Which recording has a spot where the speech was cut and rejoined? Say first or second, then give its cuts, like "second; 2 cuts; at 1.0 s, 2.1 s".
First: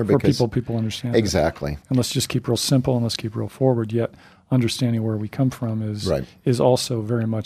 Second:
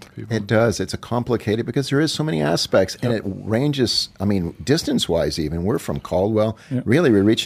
first; 1 cut; at 1.8 s